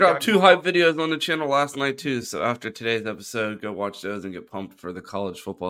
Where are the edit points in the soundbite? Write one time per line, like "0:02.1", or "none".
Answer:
none